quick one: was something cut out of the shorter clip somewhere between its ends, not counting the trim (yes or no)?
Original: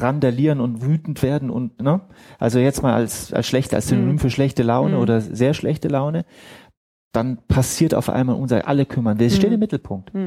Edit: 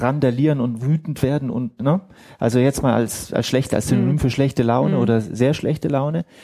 no